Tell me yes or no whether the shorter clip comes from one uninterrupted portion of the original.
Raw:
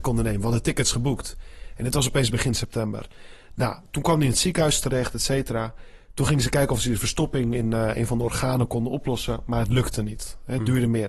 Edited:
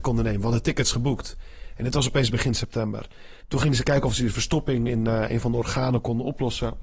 no